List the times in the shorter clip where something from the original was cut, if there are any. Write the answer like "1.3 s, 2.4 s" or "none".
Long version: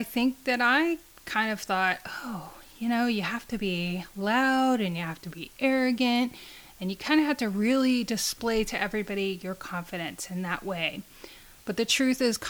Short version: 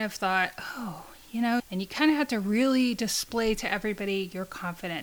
1.6 s